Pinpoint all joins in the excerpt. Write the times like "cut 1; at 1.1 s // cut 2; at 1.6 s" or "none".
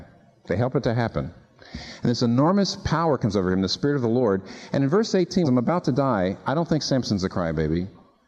cut 1; at 5.4 s